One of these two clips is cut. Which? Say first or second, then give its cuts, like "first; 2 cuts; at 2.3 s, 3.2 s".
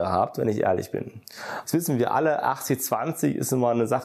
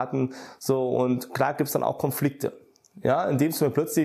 first; 1 cut; at 1.6 s